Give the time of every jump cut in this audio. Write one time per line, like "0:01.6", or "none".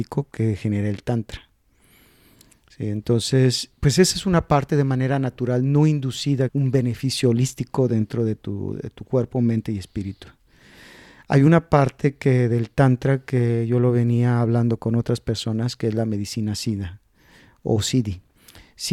0:03.7
0:06.5